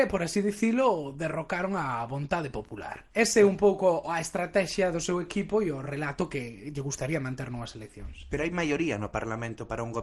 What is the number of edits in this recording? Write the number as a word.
zero